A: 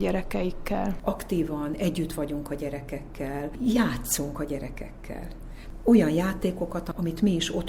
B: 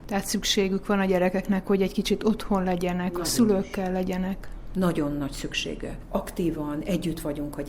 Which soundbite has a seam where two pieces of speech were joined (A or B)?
A